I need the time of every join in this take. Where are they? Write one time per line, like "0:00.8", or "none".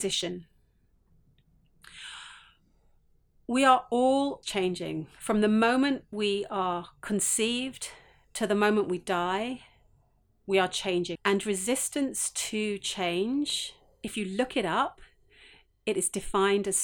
0:04.4
0:11.2